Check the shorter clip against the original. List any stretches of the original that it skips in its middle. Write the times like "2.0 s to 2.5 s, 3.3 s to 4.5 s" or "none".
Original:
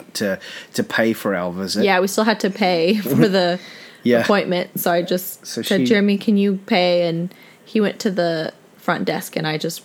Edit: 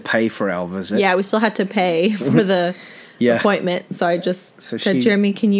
none